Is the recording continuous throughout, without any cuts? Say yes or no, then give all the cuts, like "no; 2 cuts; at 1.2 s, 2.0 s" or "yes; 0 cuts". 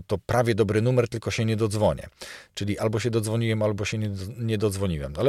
yes; 0 cuts